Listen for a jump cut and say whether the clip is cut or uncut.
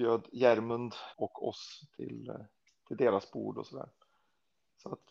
cut